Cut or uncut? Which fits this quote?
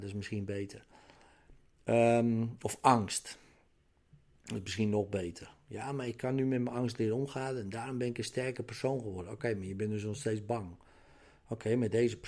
uncut